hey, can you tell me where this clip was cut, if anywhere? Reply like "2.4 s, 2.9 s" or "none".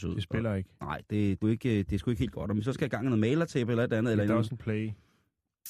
1.4 s

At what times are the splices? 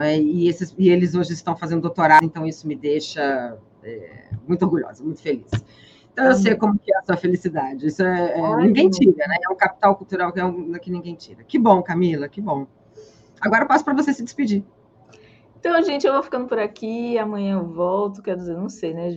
none

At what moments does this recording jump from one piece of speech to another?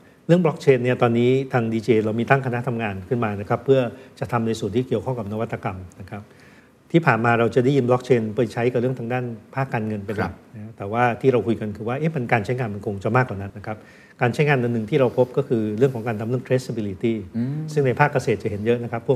13.5 s

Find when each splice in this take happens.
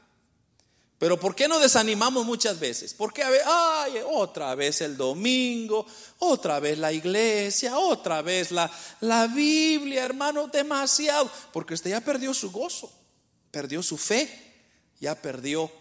none

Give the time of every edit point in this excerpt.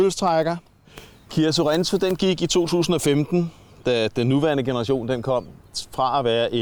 none

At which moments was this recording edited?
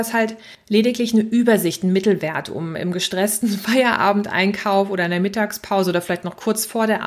none

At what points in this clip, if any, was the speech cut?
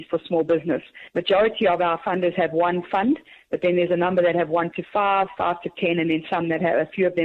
none

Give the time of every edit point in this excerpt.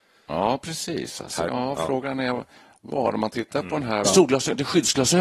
1.5 s, 4.0 s

